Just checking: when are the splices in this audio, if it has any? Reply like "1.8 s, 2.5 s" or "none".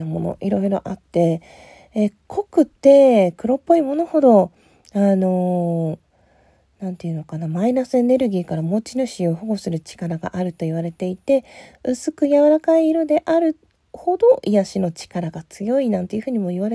none